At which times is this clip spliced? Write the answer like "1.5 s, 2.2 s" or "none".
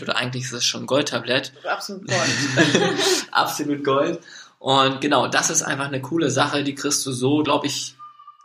none